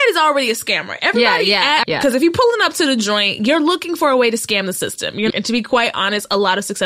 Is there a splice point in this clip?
yes; 2 cuts; at 1.8 s, 5.3 s

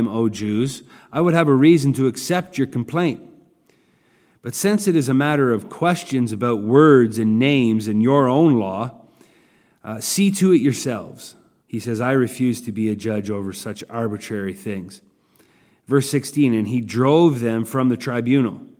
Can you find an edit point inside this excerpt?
yes; 1 cut; at 11.6 s

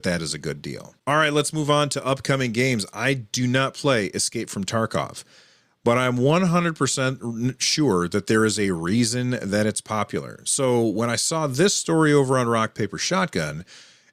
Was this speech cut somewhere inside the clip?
no; 0 cuts

